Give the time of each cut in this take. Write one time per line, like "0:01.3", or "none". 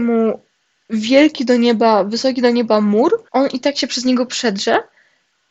0:03.3